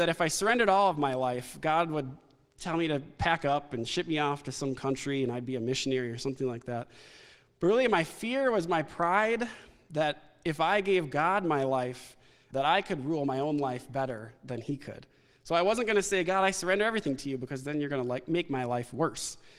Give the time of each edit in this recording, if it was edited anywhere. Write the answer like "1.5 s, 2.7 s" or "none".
12.5 s

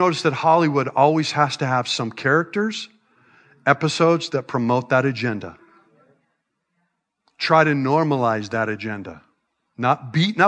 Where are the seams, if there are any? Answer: none

